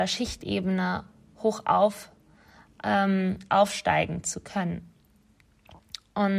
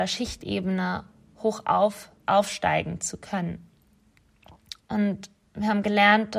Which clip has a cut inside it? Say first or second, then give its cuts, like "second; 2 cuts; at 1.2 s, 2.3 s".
second; 2 cuts; at 2.2 s, 4.8 s